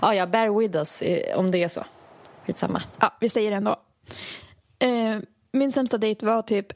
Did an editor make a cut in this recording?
no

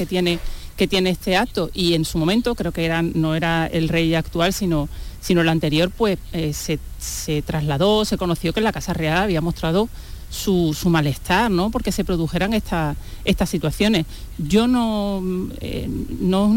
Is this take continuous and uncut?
yes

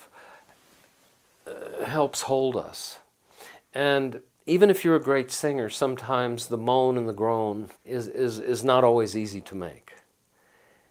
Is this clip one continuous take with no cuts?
no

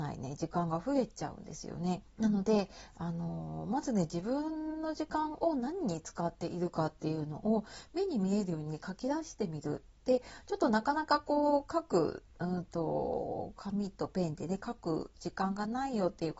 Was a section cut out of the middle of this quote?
yes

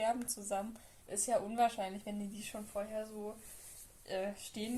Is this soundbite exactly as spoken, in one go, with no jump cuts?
yes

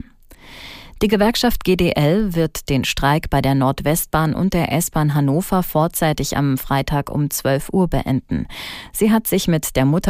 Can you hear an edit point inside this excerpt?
no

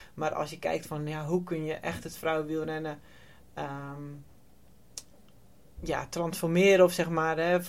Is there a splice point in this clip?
no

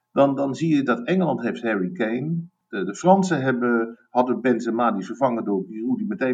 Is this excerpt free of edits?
yes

